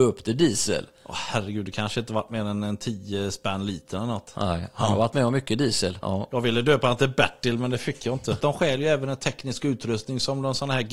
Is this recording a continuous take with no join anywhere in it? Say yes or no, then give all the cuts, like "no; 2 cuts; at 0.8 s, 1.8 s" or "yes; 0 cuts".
no; 2 cuts; at 6.0 s, 8.4 s